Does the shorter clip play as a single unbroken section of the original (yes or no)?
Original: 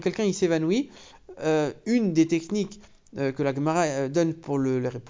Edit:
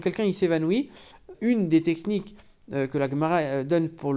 no